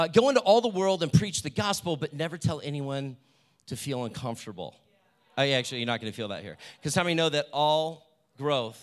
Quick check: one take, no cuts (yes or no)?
yes